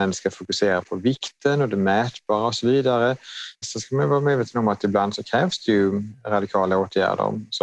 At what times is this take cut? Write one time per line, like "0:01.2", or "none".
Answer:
0:03.6